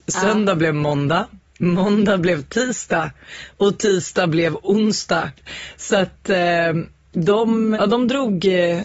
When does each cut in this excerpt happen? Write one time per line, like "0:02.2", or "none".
0:07.7